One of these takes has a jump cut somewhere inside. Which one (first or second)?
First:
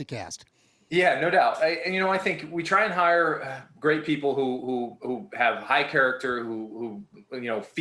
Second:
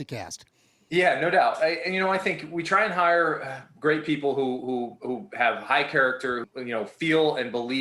second